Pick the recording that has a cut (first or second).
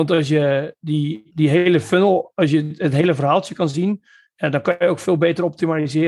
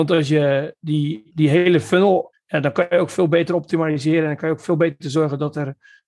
second